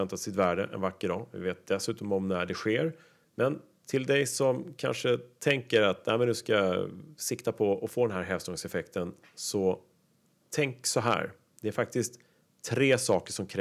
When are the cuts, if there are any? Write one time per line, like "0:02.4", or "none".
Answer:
0:03.2